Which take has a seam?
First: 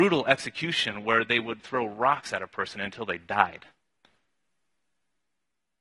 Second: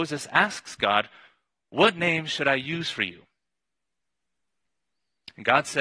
first; 1 cut; at 1.6 s

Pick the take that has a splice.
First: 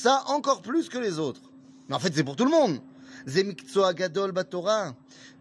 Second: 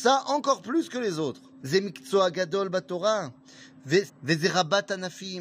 second; 2 cuts; at 1.6 s, 4.1 s

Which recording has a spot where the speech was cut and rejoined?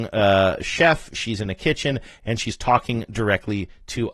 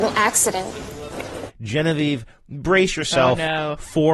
second; 1 cut; at 1.5 s

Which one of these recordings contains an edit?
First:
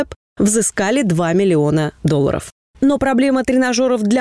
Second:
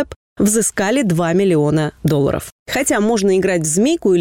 second; 1 cut; at 2.6 s

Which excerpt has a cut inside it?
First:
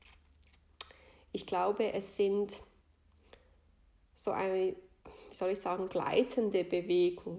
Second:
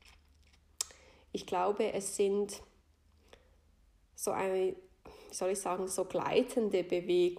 first; 1 cut; at 5.9 s

